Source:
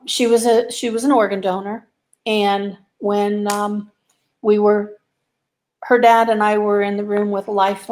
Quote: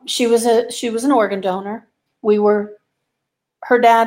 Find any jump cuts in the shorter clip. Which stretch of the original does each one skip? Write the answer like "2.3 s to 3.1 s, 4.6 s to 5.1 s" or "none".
2.1 s to 4.3 s